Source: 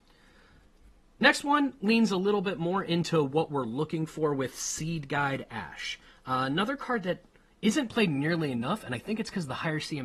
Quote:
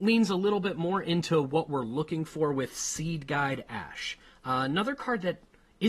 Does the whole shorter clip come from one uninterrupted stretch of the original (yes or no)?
yes